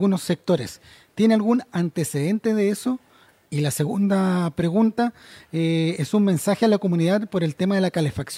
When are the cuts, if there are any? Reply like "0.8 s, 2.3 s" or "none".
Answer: none